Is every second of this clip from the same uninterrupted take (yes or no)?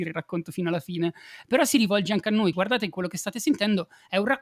no